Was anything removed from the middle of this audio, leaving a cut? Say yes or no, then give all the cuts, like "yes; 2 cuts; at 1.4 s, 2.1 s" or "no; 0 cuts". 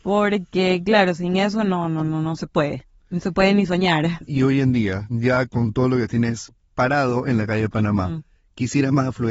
yes; 1 cut; at 4.3 s